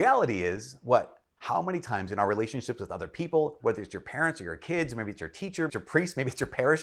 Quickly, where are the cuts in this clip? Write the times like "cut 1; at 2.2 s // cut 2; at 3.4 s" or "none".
cut 1; at 1.4 s // cut 2; at 3.6 s // cut 3; at 5.7 s